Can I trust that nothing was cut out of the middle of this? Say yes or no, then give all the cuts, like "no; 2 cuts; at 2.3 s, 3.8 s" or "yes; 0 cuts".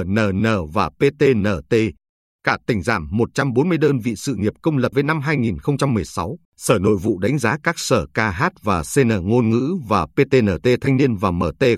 no; 2 cuts; at 4.9 s, 6.4 s